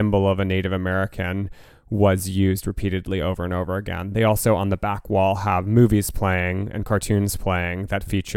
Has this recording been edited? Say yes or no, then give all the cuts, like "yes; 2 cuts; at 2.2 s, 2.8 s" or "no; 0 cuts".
no; 0 cuts